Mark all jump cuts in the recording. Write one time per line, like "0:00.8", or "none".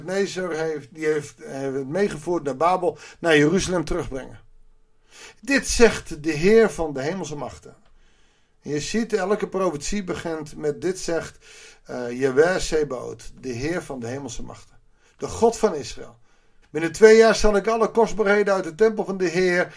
0:05.4
0:16.6